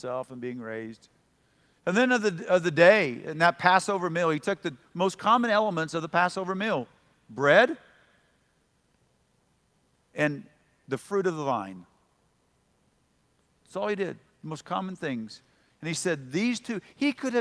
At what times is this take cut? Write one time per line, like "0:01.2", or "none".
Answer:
none